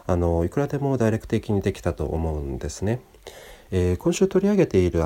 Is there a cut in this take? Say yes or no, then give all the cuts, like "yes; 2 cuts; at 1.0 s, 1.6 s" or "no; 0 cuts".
yes; 1 cut; at 3.7 s